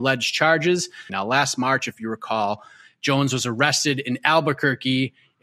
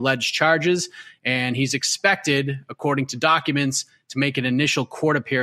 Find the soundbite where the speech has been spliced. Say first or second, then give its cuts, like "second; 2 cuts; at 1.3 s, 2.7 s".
first; 1 cut; at 1.1 s